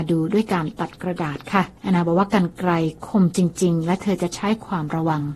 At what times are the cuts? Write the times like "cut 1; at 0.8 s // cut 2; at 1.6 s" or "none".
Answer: cut 1; at 1.8 s